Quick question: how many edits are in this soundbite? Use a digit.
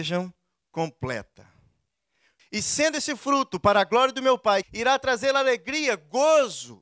2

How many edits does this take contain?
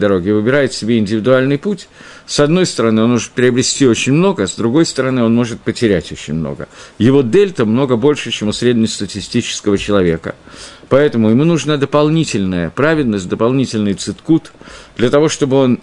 0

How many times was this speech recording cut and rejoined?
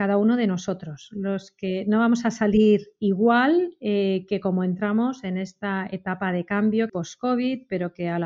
1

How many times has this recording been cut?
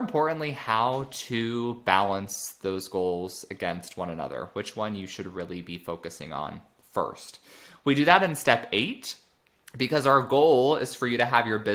0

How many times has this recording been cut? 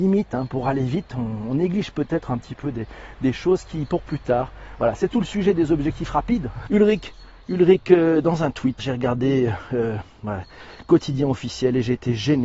2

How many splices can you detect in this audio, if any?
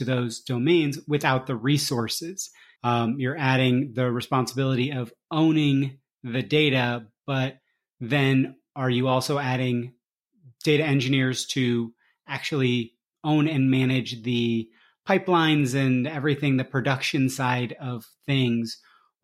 1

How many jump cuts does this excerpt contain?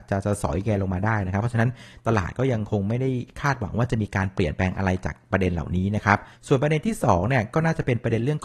1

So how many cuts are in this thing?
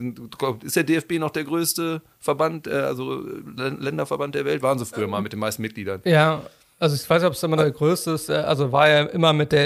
0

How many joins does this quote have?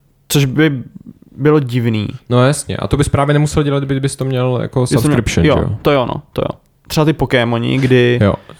1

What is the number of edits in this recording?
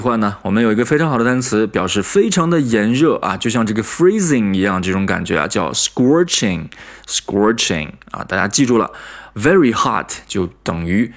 0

